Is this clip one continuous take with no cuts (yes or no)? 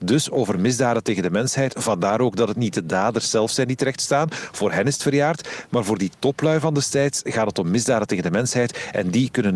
yes